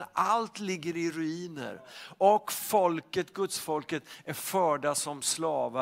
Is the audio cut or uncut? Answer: uncut